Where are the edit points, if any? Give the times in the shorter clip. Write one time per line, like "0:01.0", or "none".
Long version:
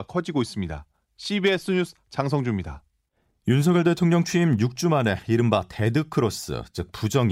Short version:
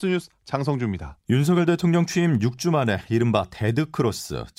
0:01.2